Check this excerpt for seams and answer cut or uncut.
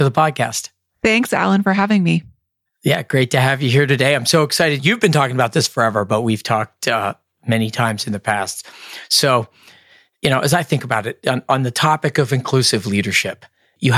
uncut